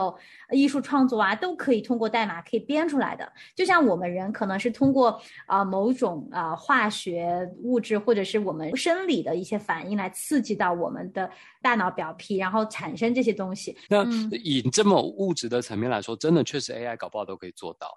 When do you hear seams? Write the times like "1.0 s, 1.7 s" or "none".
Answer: 13.9 s